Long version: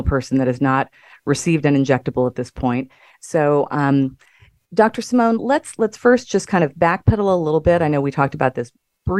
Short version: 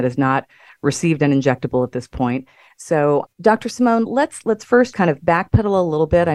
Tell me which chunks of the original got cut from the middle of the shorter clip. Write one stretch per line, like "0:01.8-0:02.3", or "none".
0:03.7-0:04.6
0:06.3-0:06.5